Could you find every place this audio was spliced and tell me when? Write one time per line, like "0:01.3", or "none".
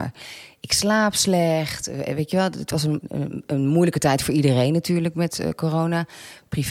0:03.0